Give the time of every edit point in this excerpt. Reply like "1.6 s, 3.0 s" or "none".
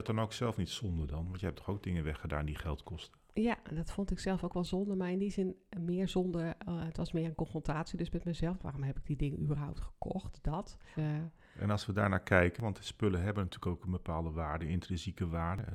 8.6 s, 11.0 s